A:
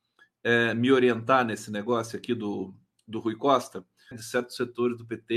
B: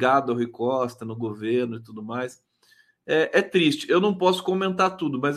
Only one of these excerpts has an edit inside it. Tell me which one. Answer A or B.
A